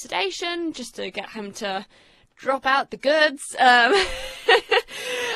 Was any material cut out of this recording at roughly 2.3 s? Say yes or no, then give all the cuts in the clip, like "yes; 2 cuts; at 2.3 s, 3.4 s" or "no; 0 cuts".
no; 0 cuts